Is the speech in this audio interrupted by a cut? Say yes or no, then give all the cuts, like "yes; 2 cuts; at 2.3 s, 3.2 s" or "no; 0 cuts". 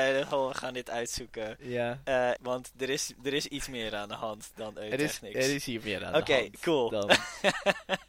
yes; 1 cut; at 2.4 s